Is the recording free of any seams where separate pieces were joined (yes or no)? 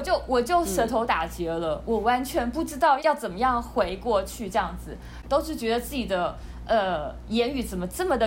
no